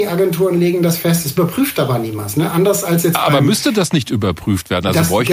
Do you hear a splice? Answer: no; 0 cuts

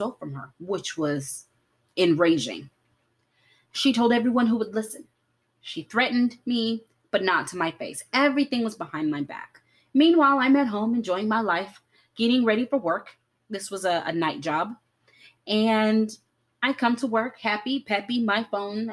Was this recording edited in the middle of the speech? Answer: no; 0 cuts

